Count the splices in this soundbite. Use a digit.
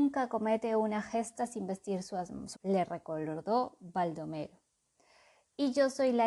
1